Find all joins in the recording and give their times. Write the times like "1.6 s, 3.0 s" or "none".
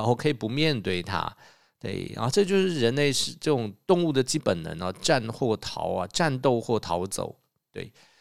4.4 s